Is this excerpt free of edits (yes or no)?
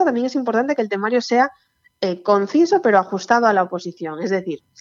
yes